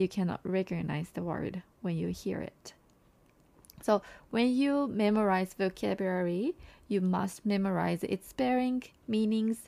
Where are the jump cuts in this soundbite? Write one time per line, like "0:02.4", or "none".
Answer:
none